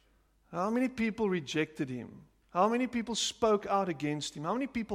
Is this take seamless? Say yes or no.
yes